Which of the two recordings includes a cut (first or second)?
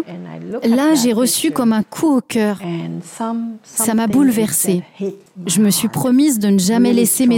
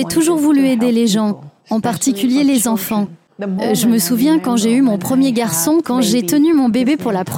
second